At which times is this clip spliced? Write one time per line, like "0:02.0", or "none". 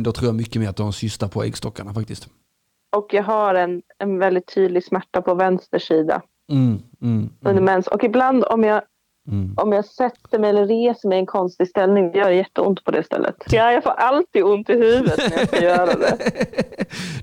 0:13.5